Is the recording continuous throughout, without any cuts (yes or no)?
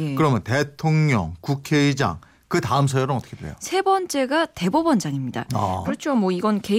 no